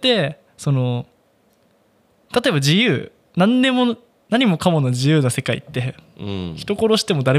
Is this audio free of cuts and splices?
yes; 0 cuts

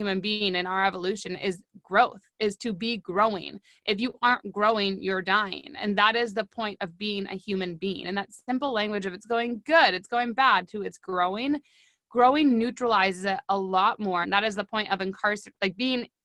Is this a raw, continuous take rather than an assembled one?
no; 2 cuts; at 8.0 s, 14.2 s

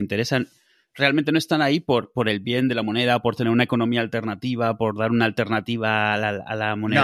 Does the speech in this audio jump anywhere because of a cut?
no; 0 cuts

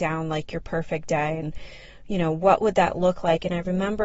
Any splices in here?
no; 0 cuts

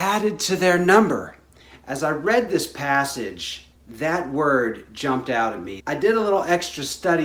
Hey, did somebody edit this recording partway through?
yes; 1 cut; at 5.8 s

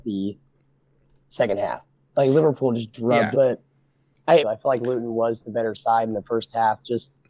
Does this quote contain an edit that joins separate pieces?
yes; 2 cuts; at 3.3 s, 4.4 s

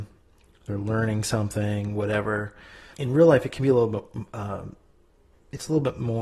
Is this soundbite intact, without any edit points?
no; 1 cut; at 2.9 s

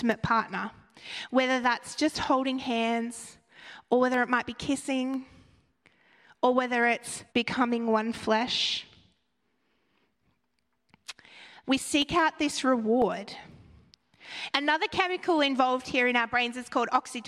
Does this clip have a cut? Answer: yes; 3 cuts; at 7.3 s, 11.6 s, 14.5 s

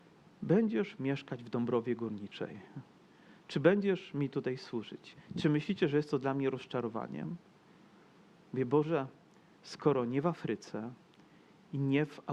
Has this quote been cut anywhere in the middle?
no; 0 cuts

